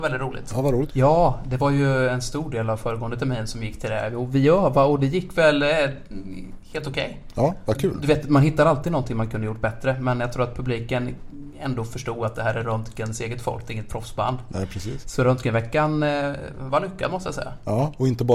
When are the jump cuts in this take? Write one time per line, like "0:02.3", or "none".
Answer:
0:00.9